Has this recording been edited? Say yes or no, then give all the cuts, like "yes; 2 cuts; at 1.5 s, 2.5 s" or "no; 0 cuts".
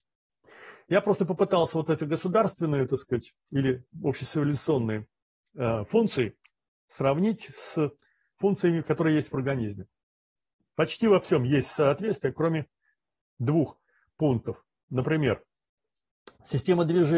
no; 0 cuts